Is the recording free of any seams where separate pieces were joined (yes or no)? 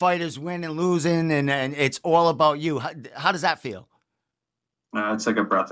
yes